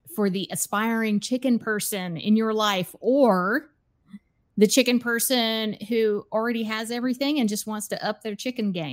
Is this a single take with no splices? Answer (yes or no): yes